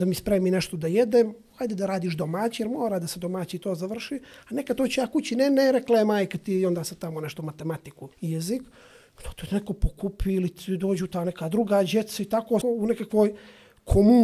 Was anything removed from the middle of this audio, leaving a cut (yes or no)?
yes